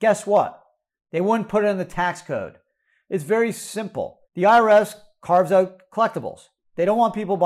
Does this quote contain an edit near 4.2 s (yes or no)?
yes